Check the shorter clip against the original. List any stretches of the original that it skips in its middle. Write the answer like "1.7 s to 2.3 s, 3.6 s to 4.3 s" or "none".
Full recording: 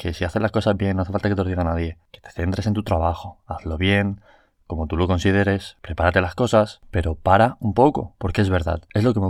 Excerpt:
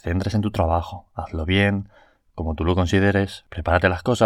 none